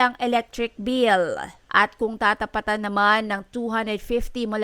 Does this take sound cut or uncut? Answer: cut